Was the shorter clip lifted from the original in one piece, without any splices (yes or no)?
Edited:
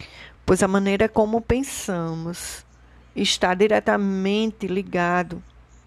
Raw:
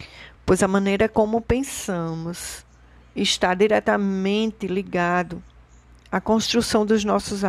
yes